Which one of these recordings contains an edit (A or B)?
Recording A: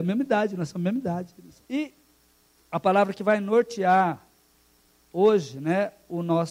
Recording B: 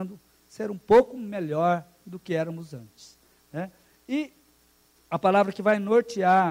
A